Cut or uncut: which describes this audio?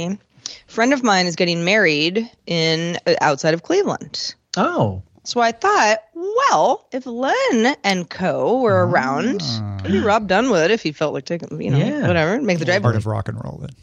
cut